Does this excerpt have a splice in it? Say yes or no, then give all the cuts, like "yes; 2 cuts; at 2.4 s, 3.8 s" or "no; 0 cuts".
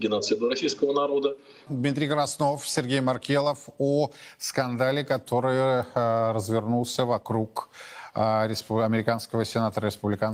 yes; 1 cut; at 1.7 s